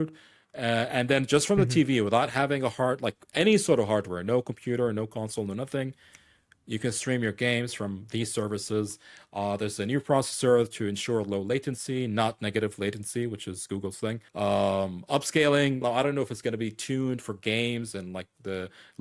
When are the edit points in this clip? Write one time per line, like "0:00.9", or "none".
0:14.3
0:15.8